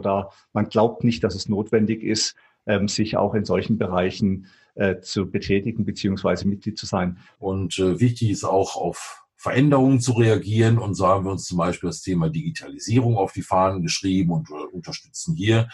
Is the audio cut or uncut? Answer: cut